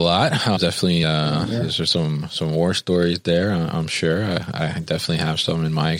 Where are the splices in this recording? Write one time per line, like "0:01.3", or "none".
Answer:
none